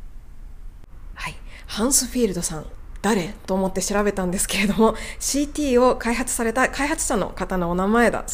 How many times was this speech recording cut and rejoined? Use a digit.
0